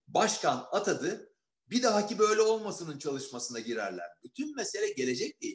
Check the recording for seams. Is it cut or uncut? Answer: cut